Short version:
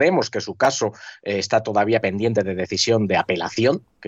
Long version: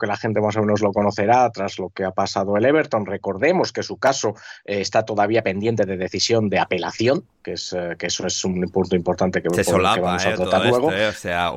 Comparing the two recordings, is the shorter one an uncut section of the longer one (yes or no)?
yes